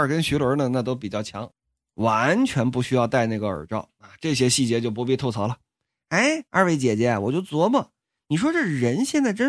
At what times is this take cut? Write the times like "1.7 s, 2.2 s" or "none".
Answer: 6.5 s